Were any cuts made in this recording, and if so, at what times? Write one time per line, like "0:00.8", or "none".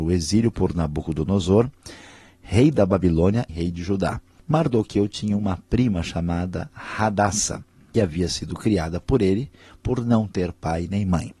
0:03.5